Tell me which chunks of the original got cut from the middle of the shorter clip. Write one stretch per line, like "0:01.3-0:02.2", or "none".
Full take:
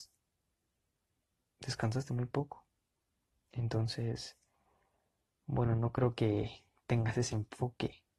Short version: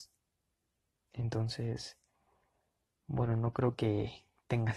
0:01.0-0:03.4